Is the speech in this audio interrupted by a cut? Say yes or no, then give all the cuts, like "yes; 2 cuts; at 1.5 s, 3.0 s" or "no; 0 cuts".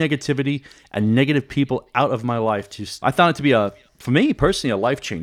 yes; 1 cut; at 3.0 s